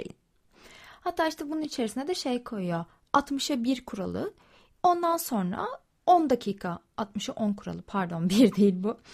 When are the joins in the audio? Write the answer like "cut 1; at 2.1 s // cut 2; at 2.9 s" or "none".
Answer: cut 1; at 4.8 s